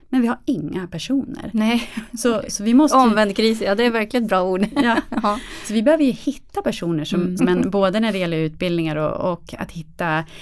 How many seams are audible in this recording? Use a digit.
1